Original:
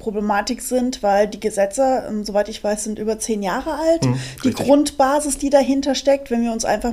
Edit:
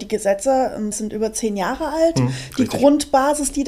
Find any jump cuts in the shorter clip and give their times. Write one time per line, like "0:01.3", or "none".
0:00.9